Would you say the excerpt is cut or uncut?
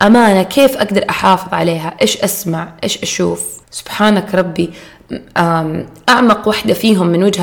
cut